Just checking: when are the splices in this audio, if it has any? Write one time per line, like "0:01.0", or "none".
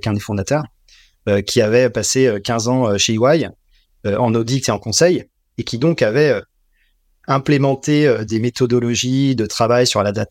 none

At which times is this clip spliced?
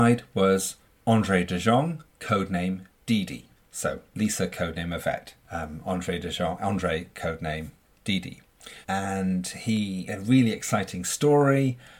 0:08.8
0:10.1

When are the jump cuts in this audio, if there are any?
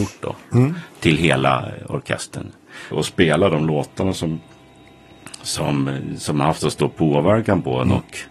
0:02.9

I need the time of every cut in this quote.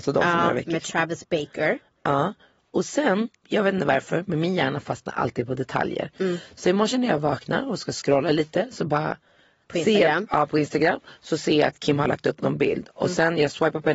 0:03.4

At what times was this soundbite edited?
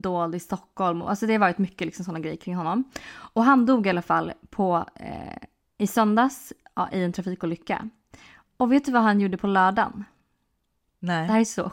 none

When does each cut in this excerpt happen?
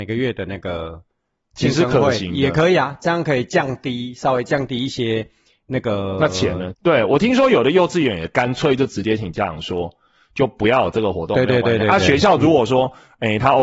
0:06.7

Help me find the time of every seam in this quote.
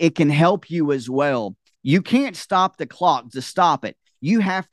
0:01.7
0:03.3

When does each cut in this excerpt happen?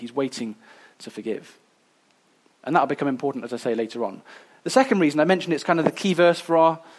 none

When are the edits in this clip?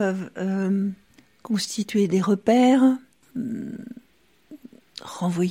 0:03.2

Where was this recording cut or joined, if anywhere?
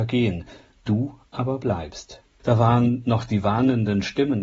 0:02.4

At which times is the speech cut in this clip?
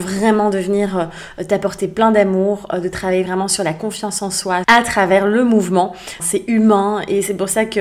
0:04.6
0:06.2

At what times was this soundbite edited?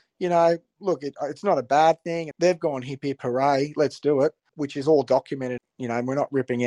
0:02.3
0:04.5
0:05.6

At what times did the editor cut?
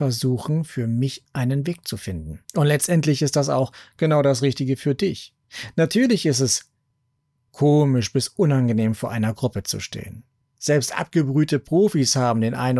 0:02.4

